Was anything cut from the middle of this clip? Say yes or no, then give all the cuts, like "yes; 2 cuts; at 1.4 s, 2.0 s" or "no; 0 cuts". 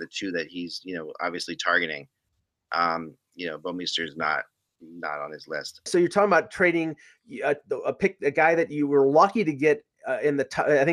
yes; 1 cut; at 5.9 s